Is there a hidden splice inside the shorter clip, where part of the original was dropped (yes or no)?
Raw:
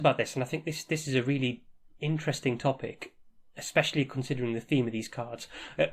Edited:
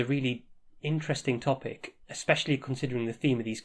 yes